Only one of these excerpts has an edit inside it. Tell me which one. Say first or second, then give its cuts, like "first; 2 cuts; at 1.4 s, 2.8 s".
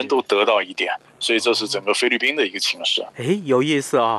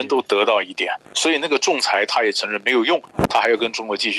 second; 1 cut; at 1.1 s